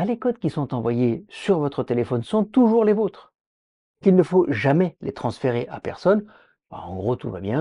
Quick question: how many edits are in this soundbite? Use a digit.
1